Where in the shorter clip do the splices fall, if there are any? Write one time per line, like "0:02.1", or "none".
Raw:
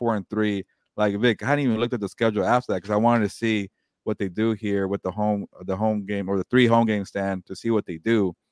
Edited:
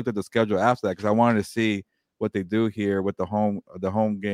none